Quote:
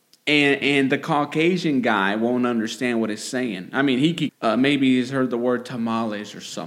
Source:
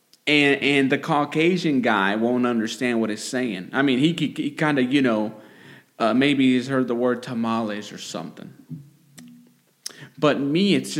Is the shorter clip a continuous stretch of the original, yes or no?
no